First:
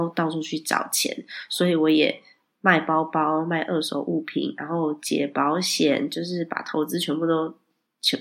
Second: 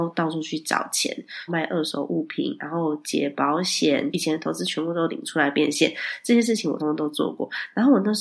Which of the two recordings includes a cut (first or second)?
second